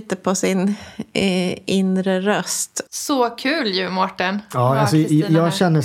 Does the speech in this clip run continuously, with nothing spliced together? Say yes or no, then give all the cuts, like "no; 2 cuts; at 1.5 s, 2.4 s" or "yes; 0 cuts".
no; 1 cut; at 2.9 s